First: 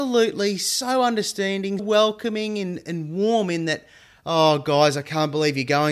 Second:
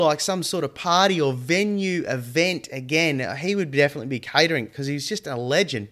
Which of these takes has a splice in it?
first; 1 cut; at 1.8 s

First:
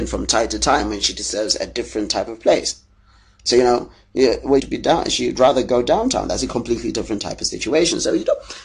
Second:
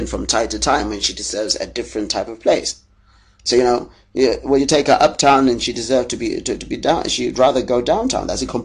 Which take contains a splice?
first; 1 cut; at 4.6 s

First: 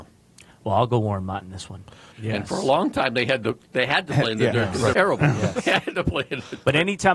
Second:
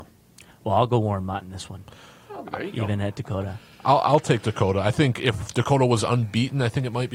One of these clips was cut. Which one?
first; 2 cuts; at 2.1 s, 4.9 s

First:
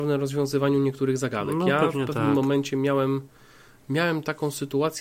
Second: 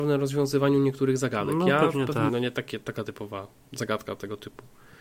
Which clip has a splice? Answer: second; 1 cut; at 2.3 s

